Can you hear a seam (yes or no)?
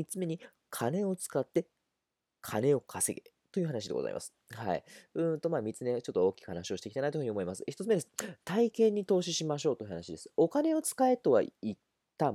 no